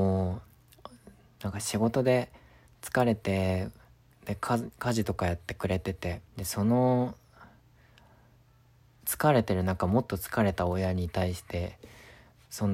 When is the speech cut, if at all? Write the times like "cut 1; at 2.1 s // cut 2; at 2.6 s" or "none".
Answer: cut 1; at 4.1 s // cut 2; at 6.3 s